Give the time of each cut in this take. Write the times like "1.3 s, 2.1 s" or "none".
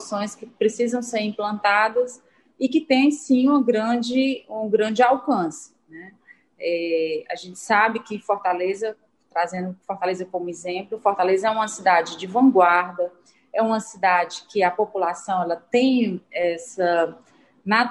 none